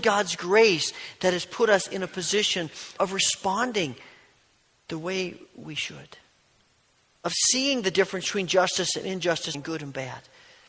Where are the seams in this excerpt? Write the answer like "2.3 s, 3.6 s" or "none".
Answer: 3.0 s, 9.5 s